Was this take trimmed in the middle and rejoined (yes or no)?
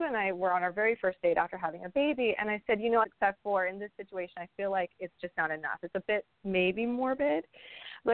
yes